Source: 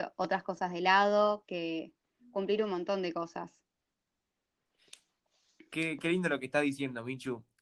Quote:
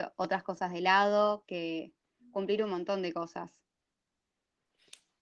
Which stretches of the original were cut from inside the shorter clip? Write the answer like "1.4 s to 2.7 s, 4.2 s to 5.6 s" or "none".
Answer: none